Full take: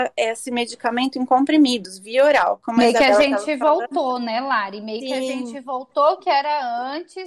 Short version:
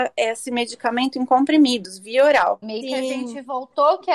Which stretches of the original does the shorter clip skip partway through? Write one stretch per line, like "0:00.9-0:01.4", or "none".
0:02.6-0:04.8

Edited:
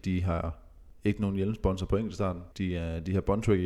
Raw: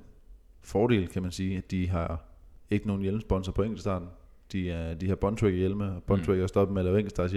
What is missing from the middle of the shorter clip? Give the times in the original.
0:04.2-0:04.5

